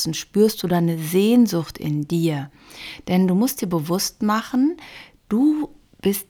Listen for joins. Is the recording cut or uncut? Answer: uncut